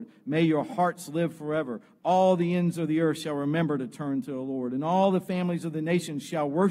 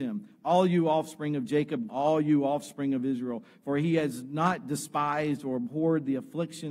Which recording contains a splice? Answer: second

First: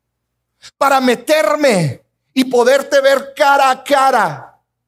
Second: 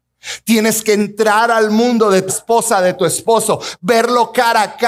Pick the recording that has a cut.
second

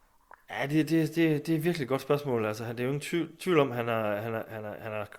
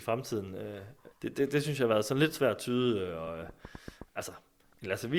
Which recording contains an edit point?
second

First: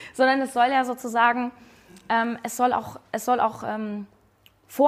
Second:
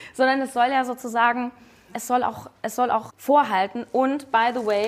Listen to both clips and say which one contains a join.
second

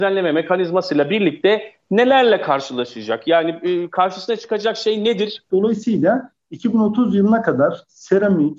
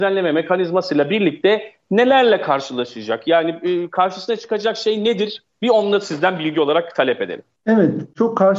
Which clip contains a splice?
first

